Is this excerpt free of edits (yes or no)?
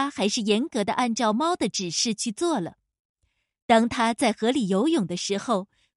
yes